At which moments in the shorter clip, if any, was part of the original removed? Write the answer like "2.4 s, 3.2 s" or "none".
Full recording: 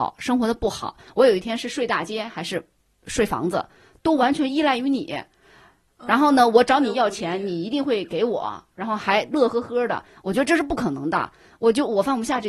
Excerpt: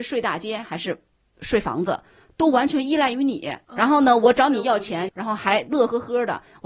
3.6 s, 5.1 s